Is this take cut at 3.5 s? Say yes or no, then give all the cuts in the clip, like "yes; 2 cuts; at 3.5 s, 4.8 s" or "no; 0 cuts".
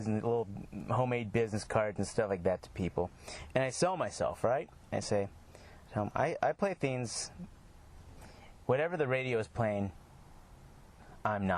no; 0 cuts